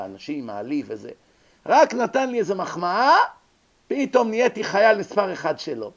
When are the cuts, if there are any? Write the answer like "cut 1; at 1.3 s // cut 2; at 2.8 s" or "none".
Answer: none

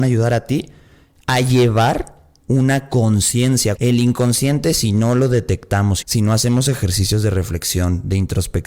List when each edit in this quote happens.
cut 1; at 3.8 s // cut 2; at 6.0 s

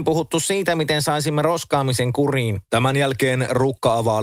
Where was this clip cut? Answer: cut 1; at 2.7 s

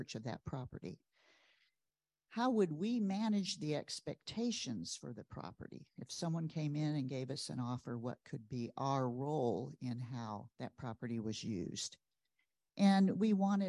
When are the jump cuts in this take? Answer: cut 1; at 10.5 s

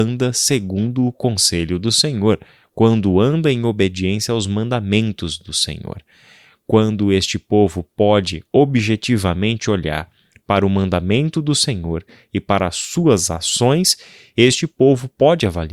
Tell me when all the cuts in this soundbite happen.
none

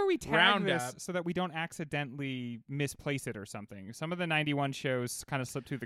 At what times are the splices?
none

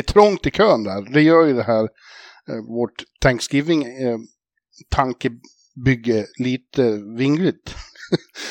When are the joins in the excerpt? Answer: none

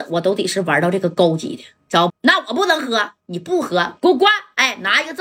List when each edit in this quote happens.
cut 1; at 2.1 s

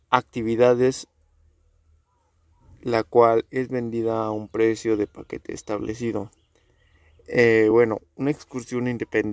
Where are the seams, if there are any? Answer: none

